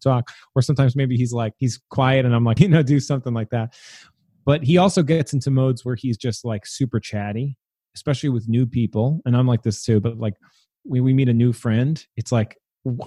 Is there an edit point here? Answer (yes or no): yes